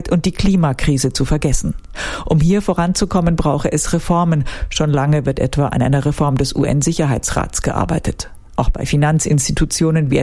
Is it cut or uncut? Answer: uncut